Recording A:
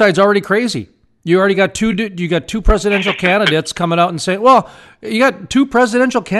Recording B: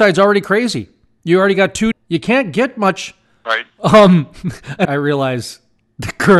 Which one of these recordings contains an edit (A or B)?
B